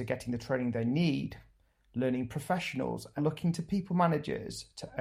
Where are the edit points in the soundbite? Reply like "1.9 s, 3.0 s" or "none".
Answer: 3.2 s